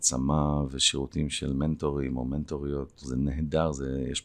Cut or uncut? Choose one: cut